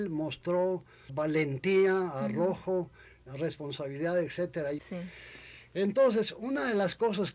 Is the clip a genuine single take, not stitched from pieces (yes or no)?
no